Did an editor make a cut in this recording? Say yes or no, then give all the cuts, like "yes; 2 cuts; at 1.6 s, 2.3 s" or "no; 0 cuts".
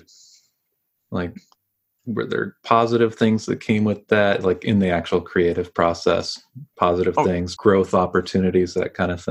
yes; 1 cut; at 7.6 s